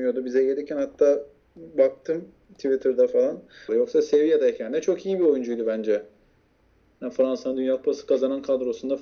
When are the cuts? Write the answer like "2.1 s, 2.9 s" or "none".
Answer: 3.7 s